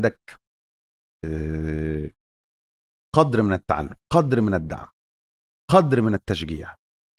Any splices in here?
yes; 1 cut; at 4.0 s

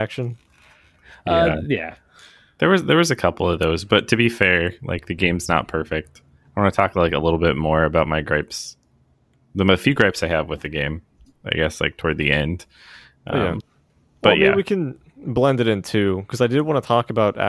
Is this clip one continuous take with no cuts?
yes; 0 cuts

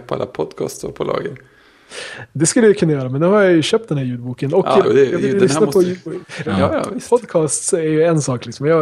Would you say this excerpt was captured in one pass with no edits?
no; 2 cuts; at 4.8 s, 6.4 s

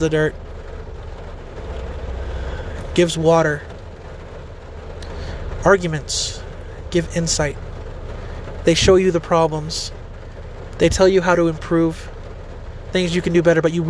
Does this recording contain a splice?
no; 0 cuts

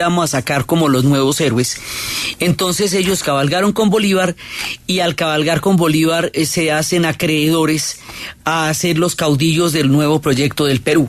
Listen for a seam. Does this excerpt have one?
no; 0 cuts

